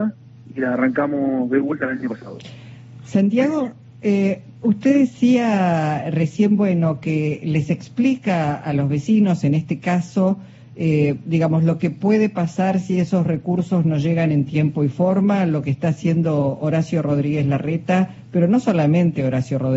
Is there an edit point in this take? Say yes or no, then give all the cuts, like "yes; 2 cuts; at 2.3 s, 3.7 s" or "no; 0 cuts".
no; 0 cuts